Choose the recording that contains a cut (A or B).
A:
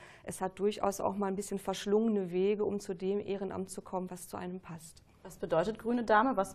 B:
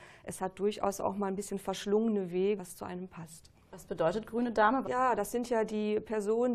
B